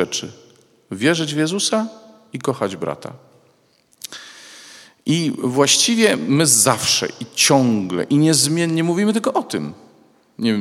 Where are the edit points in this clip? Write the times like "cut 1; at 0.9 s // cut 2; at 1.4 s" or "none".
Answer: none